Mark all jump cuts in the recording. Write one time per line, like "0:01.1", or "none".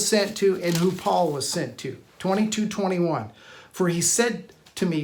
none